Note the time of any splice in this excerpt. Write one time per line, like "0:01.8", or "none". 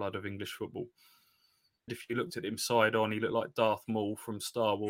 0:01.9